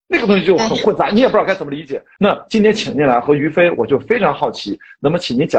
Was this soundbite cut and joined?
yes; 1 cut; at 2.2 s

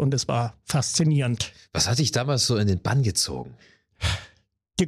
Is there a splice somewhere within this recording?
no; 0 cuts

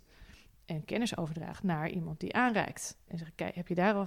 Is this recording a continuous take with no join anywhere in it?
no; 1 cut; at 3.1 s

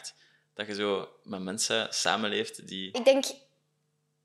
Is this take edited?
yes; 1 cut; at 2.9 s

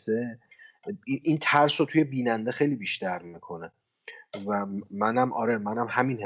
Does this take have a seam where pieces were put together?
yes; 1 cut; at 1.2 s

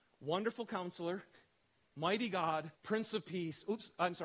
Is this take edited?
yes; 1 cut; at 2.8 s

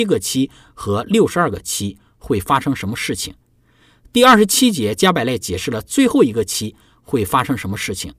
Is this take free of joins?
yes; 0 cuts

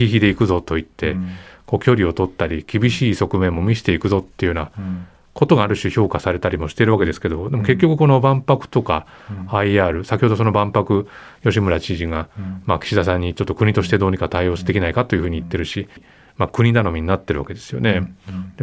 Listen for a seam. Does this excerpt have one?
yes; 1 cut; at 16.0 s

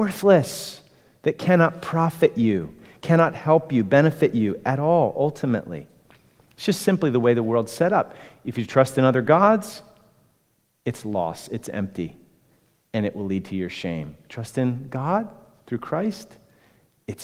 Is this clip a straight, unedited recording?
yes; 0 cuts

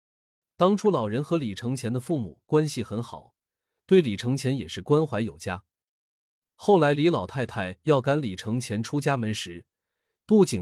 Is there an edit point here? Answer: no; 0 cuts

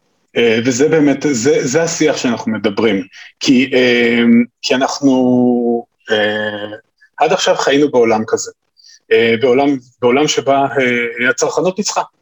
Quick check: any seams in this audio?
no; 0 cuts

